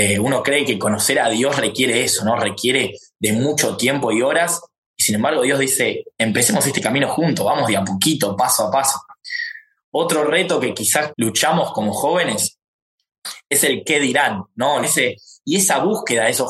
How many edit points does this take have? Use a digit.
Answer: 2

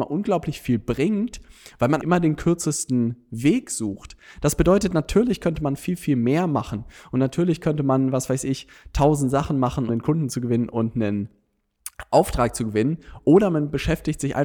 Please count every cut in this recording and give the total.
2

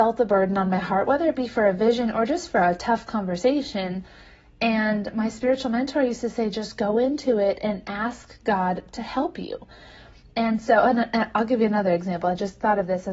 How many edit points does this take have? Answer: 0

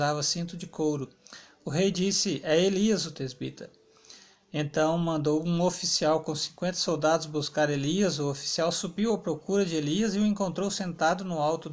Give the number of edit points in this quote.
0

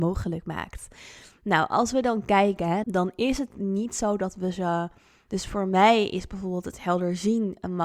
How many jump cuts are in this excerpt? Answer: 2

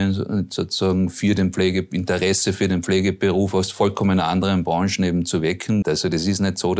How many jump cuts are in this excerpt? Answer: 1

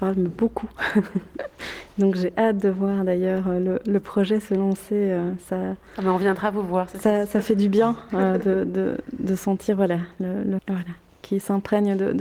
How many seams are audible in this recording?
1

